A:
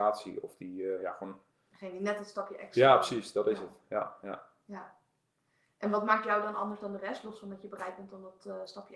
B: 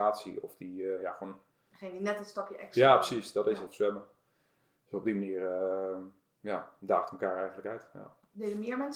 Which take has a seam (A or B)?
B